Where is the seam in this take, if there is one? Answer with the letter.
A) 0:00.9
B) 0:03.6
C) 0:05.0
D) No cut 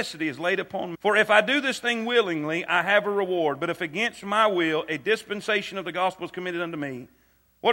A